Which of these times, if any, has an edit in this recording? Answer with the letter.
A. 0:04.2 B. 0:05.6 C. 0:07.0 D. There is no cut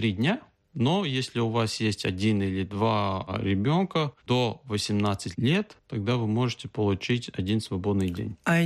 A